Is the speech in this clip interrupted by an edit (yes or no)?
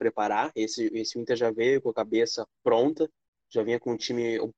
no